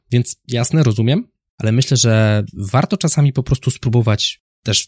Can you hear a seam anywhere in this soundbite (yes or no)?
yes